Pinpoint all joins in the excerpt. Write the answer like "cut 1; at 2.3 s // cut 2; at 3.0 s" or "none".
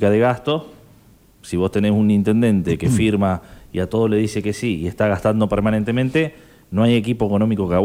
none